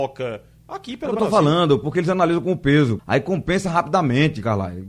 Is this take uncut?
no; 1 cut; at 3.0 s

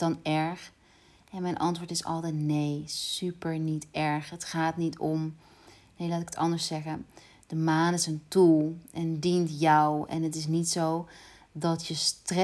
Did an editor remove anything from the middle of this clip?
no; 0 cuts

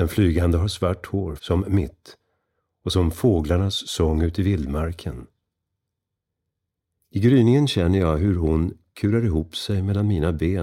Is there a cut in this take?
yes; 1 cut; at 1.4 s

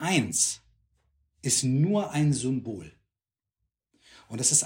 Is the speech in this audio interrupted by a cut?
no; 0 cuts

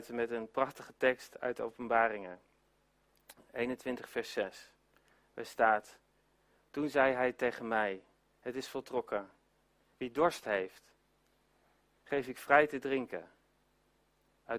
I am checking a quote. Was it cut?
yes; 1 cut; at 9.9 s

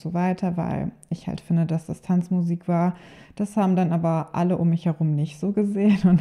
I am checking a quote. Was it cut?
no; 0 cuts

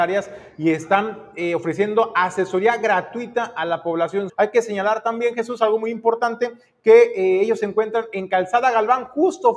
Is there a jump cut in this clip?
yes; 1 cut; at 4.3 s

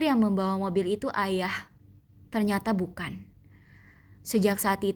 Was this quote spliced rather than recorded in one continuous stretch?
no; 0 cuts

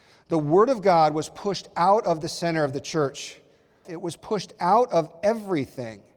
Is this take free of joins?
no; 1 cut; at 3.8 s

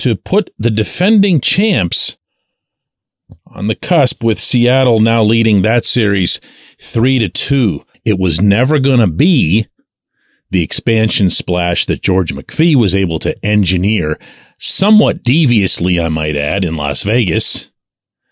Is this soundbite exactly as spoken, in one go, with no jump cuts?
no; 1 cut; at 7.9 s

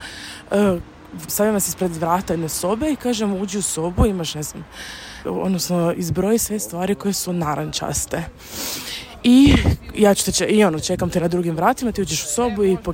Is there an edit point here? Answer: yes; 2 cuts; at 1.3 s, 5.3 s

